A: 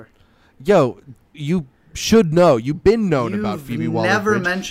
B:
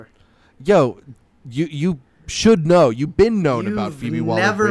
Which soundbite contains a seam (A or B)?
A